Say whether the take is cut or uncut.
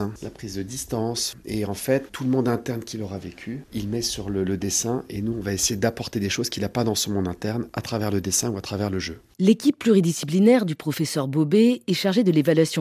cut